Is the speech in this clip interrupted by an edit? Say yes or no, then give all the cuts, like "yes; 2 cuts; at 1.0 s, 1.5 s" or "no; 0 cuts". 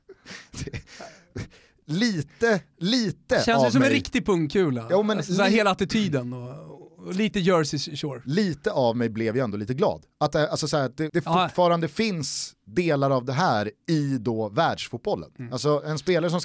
yes; 1 cut; at 11.1 s